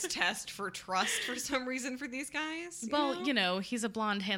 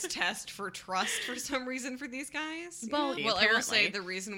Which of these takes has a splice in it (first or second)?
second